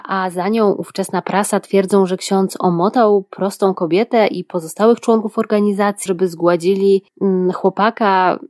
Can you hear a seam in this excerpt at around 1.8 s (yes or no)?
no